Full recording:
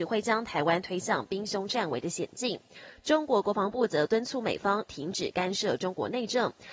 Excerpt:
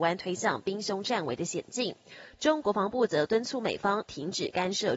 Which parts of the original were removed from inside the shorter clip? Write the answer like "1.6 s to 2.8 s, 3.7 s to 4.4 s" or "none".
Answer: 3.3 s to 3.4 s